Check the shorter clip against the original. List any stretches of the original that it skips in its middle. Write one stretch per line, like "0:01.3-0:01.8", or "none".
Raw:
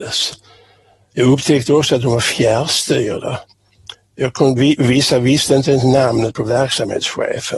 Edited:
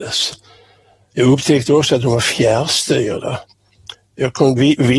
none

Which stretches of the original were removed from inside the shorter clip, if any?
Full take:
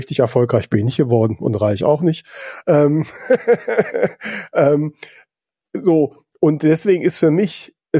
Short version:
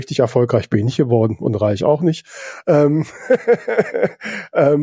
none

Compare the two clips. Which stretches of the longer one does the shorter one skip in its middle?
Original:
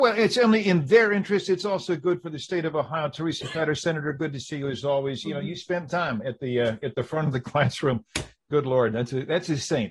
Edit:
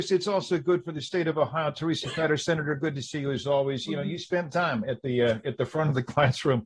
none

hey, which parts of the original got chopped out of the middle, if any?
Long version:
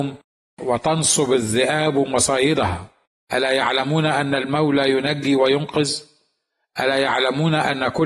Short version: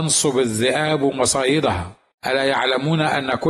0:03.1-0:06.7

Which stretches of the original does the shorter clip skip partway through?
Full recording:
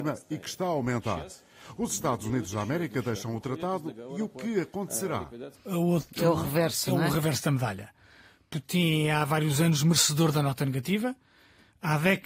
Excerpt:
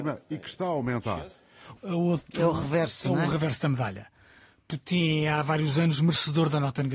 0:01.7-0:05.6

